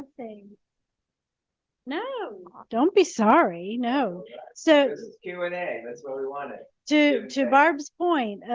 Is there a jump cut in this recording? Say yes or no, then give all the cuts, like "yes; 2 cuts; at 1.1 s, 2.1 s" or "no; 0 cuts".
no; 0 cuts